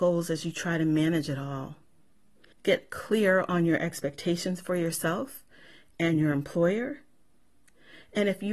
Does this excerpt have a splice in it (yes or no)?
yes